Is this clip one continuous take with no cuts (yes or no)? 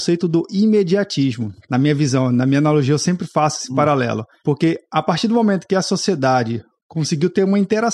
no